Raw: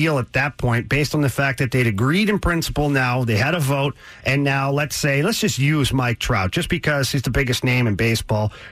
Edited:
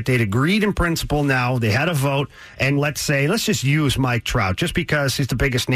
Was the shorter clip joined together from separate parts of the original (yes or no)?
yes